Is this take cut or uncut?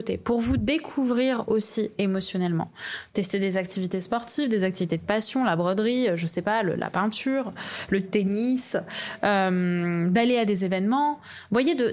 uncut